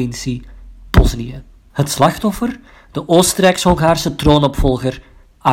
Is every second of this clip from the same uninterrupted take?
yes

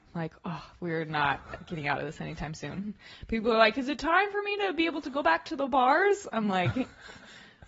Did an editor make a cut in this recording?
no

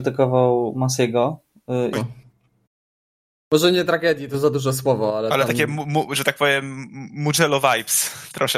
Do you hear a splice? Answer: yes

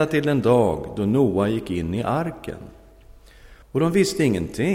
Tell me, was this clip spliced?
yes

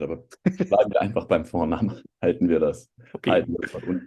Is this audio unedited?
yes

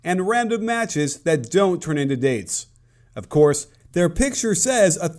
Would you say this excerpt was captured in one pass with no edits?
yes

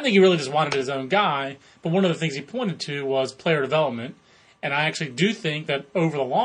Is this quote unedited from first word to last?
yes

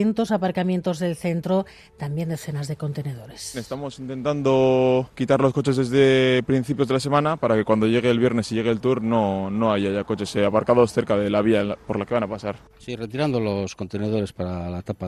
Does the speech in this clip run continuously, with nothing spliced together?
yes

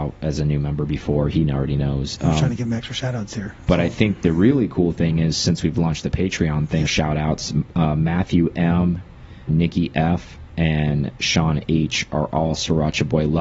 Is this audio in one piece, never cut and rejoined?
no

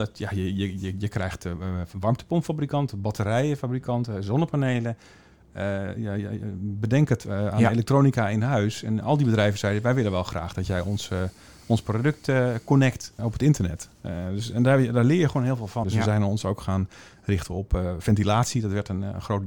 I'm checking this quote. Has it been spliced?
yes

